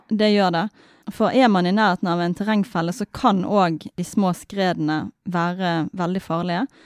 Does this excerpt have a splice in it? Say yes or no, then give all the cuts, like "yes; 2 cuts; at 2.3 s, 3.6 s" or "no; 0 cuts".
no; 0 cuts